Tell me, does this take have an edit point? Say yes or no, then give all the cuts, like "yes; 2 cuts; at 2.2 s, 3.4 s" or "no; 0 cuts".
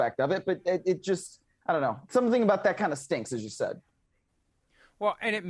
no; 0 cuts